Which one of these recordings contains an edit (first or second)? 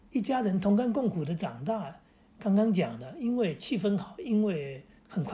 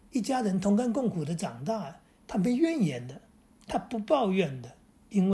second